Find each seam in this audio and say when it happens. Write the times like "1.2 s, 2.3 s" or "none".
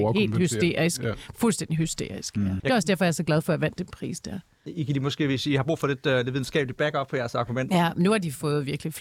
2.6 s, 7.7 s